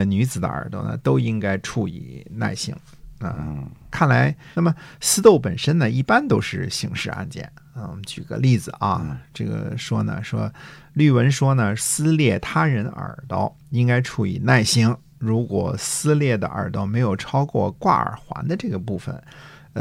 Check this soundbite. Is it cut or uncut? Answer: cut